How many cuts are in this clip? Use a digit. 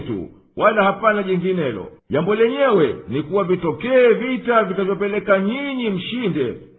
1